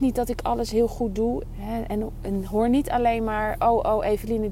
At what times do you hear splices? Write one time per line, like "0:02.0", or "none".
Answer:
0:01.4